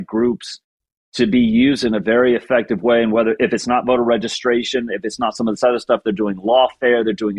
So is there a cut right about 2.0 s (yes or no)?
no